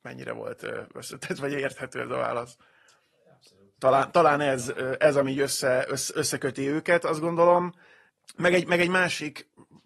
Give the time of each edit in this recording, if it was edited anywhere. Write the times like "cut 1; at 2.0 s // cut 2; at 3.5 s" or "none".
none